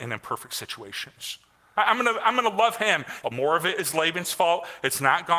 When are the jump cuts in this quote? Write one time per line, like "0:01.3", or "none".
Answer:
0:01.8
0:03.2